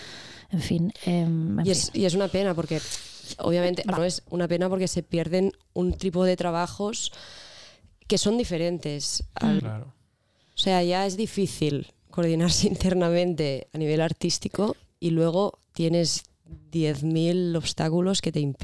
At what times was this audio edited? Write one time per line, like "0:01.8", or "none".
0:04.0
0:09.6